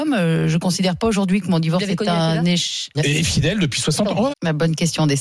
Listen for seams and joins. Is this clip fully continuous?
no; 2 cuts; at 2.9 s, 4.3 s

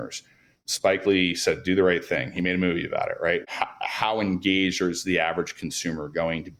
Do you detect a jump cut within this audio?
yes; 1 cut; at 3.4 s

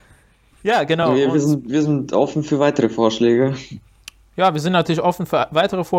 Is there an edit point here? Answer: no; 0 cuts

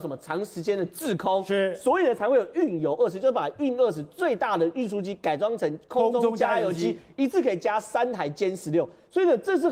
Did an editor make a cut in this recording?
no; 0 cuts

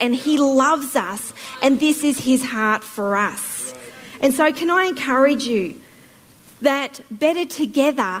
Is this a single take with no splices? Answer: yes; 0 cuts

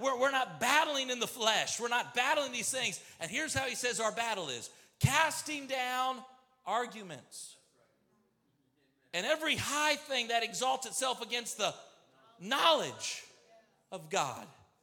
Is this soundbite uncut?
yes; 0 cuts

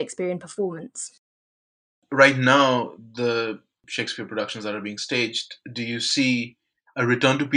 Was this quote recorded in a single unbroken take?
yes; 0 cuts

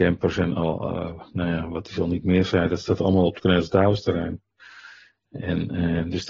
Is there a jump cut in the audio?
no; 0 cuts

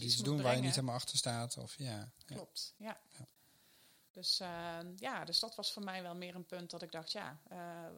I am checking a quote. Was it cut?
no; 0 cuts

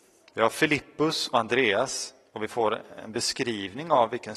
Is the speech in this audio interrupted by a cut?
no; 0 cuts

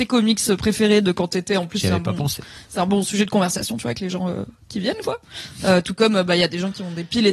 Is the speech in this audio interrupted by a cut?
no; 0 cuts

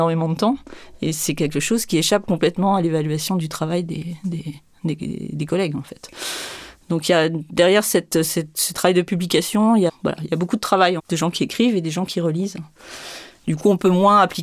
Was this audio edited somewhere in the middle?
yes; 3 cuts; at 9.9 s, 11.0 s, 13.4 s

